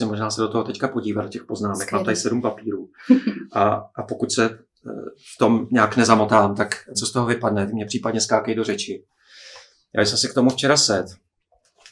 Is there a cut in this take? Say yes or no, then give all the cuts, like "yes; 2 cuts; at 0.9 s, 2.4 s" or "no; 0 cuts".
yes; 1 cut; at 6.9 s